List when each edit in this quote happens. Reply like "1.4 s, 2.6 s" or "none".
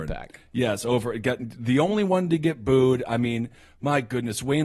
none